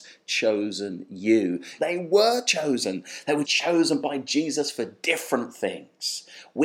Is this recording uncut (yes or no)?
no